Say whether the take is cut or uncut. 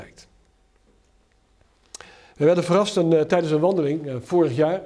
uncut